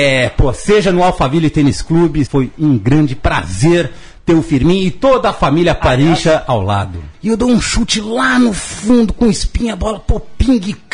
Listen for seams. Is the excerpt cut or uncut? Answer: cut